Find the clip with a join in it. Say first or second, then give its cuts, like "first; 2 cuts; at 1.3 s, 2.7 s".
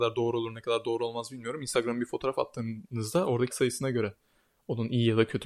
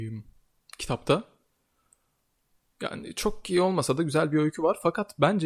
first; 1 cut; at 3.5 s